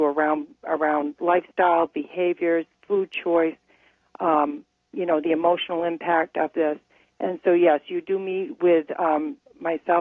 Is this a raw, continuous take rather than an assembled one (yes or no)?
yes